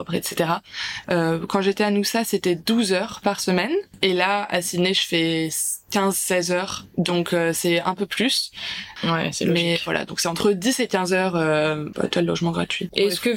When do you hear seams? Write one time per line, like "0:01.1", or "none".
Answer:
0:01.0
0:09.0
0:11.9